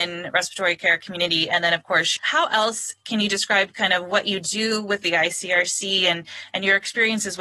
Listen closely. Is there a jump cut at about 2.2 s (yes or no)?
yes